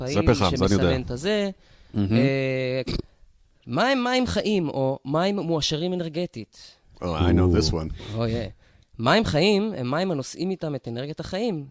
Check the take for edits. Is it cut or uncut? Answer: cut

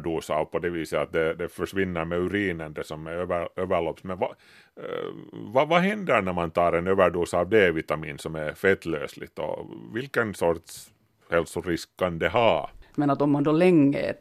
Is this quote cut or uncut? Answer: cut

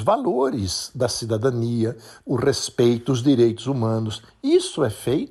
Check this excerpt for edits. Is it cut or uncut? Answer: cut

